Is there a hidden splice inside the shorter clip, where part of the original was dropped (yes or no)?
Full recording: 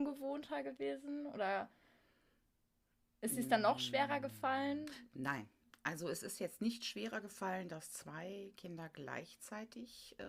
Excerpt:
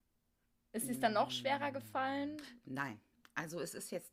no